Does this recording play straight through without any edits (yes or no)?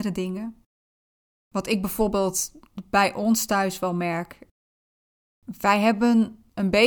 yes